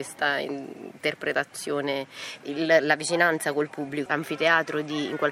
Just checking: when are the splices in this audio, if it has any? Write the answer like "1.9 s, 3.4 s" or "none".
2.4 s, 4.1 s